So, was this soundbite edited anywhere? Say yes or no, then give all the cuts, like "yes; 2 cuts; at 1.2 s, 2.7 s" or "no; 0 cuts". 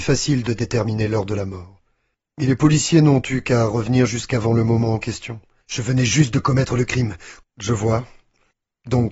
yes; 2 cuts; at 5.6 s, 7.4 s